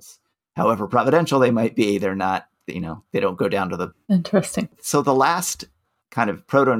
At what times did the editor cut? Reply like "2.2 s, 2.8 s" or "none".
3.9 s